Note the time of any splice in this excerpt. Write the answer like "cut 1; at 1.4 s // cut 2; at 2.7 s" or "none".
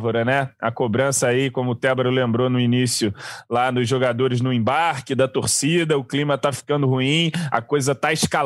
none